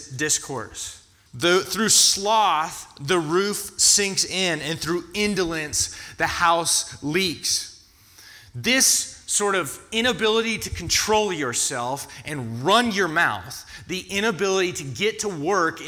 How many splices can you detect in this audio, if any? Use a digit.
1